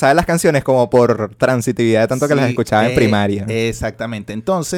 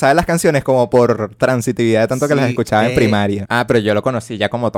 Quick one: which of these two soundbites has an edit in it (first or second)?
second